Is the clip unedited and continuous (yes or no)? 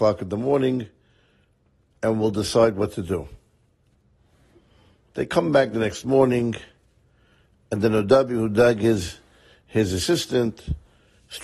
yes